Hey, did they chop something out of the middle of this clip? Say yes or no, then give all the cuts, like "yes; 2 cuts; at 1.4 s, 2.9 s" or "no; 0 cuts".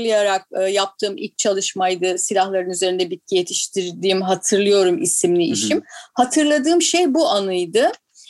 no; 0 cuts